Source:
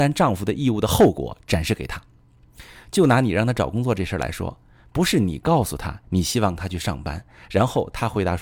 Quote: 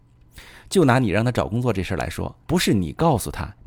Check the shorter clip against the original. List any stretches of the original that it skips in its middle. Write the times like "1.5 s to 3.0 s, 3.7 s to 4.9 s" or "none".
4.7 s to 4.9 s